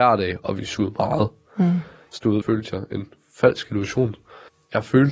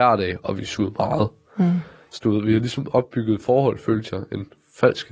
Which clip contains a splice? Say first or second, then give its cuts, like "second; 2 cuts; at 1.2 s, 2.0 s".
first; 1 cut; at 2.4 s